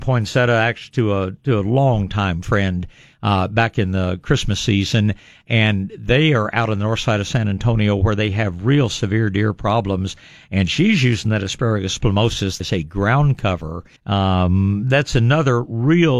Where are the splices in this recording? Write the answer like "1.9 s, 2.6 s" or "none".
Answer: 12.6 s, 14.0 s